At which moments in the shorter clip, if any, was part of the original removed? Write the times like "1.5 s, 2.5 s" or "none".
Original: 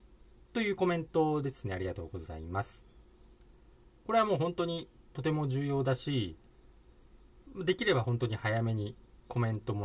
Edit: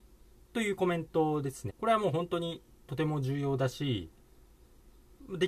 1.7 s